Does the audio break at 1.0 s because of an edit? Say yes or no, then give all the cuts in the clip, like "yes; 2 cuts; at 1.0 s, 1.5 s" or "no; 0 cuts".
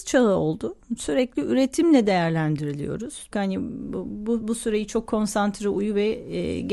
no; 1 cut; at 3.3 s